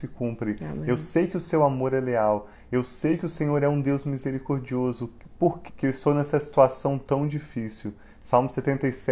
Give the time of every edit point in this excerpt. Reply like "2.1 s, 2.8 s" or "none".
5.7 s

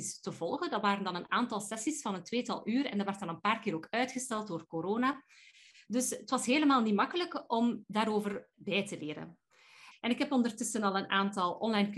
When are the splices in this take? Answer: 8.5 s, 9.9 s

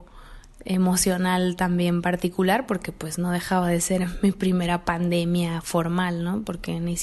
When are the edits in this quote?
none

